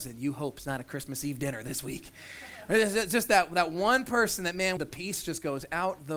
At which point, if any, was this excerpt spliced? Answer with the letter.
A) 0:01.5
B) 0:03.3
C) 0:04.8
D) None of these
C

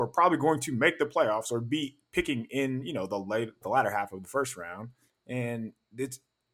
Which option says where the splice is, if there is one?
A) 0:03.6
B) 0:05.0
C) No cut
A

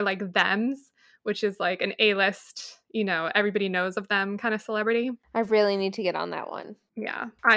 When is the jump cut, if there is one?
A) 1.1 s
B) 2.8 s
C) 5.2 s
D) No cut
C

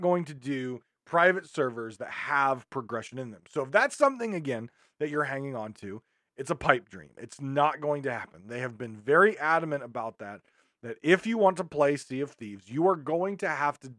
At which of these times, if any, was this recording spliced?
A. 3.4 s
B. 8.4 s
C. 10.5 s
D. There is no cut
D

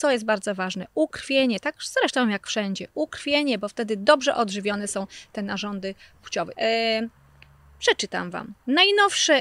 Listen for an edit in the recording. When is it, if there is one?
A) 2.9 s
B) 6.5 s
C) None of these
B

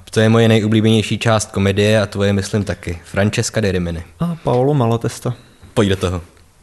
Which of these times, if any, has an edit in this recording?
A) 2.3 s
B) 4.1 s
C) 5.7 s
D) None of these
D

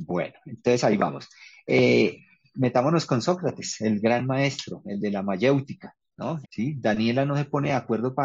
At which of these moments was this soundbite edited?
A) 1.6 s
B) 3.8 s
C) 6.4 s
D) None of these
C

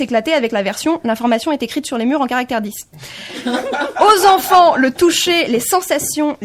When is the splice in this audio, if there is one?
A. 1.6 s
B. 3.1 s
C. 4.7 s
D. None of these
D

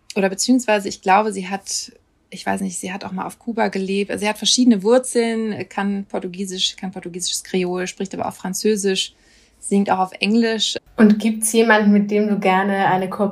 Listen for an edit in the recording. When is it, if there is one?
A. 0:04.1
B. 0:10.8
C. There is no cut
B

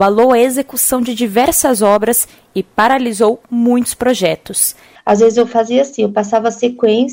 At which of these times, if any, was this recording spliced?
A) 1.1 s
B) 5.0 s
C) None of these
B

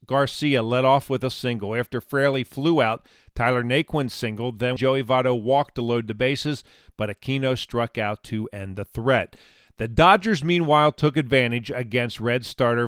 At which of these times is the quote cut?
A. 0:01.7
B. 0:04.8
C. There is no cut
B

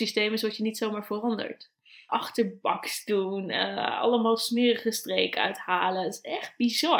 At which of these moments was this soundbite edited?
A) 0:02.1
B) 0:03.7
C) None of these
A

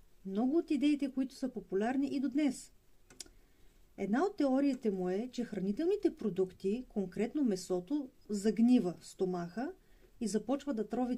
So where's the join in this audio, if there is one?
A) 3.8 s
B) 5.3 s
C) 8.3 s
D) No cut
C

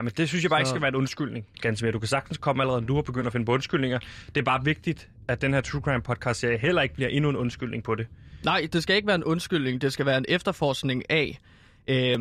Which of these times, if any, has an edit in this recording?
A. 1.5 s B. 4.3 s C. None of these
A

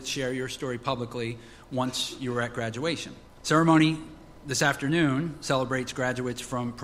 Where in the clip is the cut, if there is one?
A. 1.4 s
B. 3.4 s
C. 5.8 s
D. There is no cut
B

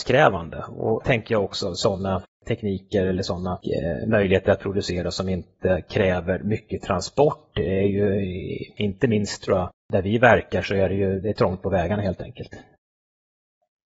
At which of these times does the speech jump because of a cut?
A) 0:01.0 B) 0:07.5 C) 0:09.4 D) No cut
A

